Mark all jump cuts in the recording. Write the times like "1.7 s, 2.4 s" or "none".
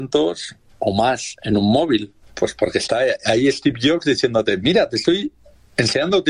2.2 s